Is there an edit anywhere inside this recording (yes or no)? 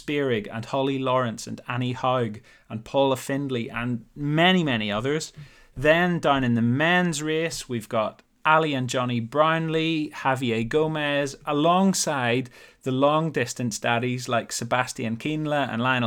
no